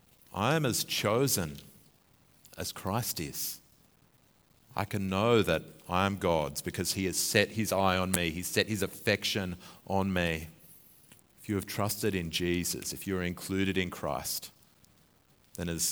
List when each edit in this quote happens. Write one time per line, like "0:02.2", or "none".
0:11.2

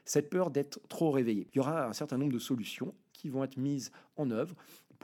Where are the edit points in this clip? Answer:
0:01.5

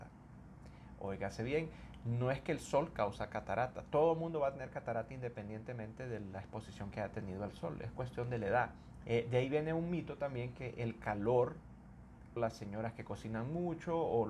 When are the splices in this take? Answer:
0:09.0
0:12.4

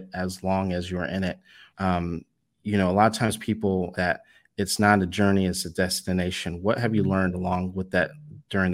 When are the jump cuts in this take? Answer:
0:01.7
0:03.9

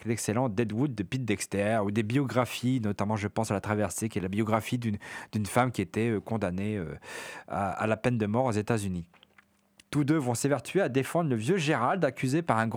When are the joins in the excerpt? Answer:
0:09.8

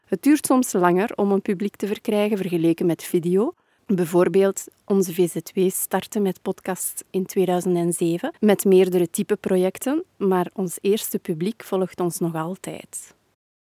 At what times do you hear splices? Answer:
0:03.8
0:08.4

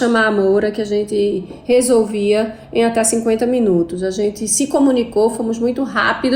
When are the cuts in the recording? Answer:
none

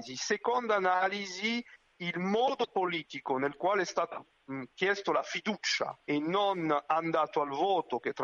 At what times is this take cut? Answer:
0:06.0

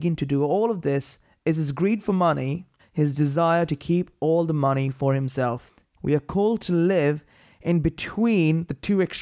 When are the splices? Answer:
0:02.8
0:06.0

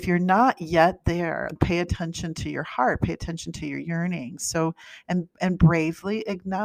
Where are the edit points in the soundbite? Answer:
0:01.6

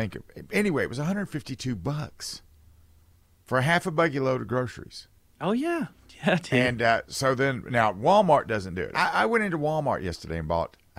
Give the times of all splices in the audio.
0:08.9

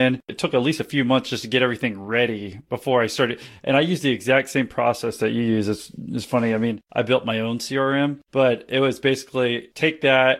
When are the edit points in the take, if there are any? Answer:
none

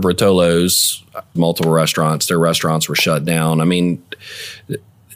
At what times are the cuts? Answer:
0:01.4

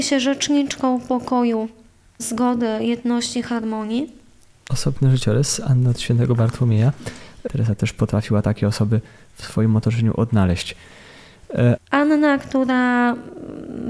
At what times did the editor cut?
0:04.7
0:07.5
0:11.8

